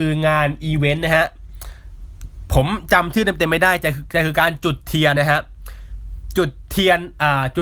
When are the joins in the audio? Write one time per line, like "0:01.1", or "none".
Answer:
0:05.1